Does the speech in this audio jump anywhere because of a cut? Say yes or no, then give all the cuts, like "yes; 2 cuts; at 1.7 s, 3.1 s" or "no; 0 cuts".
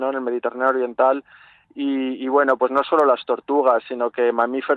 no; 0 cuts